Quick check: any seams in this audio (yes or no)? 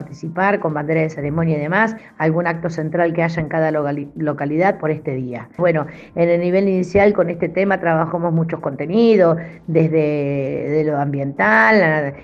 yes